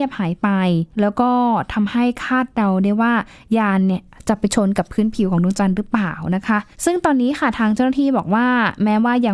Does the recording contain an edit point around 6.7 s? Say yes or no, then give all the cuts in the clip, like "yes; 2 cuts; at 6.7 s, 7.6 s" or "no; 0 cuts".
yes; 2 cuts; at 0.9 s, 6.7 s